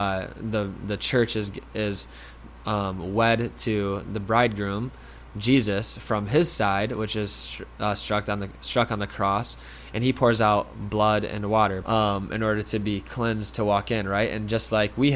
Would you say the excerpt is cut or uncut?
cut